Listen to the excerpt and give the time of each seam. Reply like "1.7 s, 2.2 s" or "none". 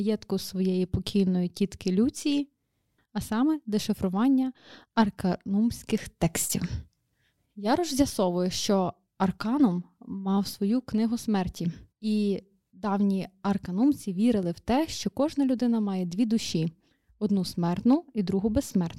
3.0 s, 11.9 s